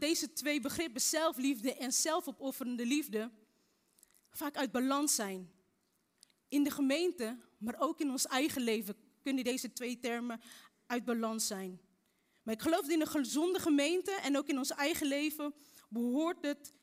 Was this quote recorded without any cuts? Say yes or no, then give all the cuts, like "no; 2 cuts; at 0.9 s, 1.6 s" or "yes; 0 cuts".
yes; 0 cuts